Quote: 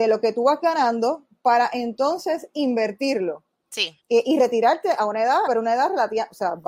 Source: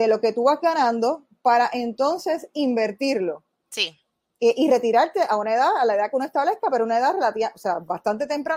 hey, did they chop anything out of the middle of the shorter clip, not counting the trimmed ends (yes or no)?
yes